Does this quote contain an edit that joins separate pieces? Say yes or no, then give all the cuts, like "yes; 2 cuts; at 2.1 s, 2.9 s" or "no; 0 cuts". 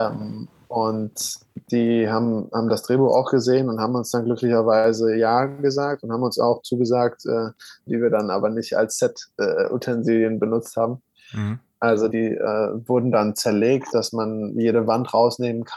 yes; 3 cuts; at 7.9 s, 12.1 s, 13.9 s